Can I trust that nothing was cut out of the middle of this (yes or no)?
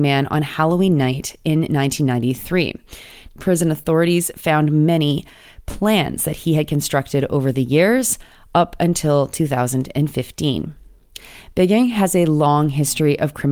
no